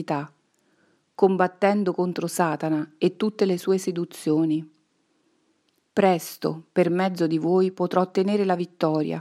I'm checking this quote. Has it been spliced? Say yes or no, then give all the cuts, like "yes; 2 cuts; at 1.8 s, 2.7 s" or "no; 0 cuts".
no; 0 cuts